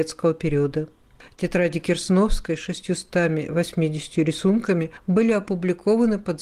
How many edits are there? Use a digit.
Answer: 0